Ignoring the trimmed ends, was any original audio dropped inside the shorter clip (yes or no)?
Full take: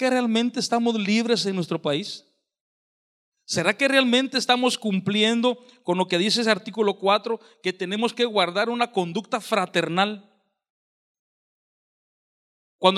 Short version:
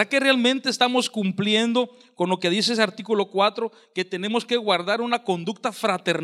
no